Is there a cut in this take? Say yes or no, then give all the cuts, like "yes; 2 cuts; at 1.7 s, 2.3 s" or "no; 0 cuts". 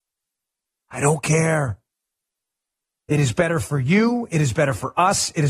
no; 0 cuts